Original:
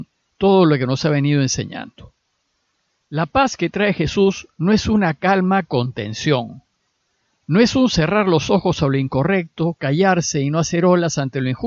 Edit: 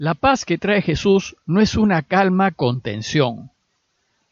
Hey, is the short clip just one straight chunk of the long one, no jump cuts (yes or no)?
yes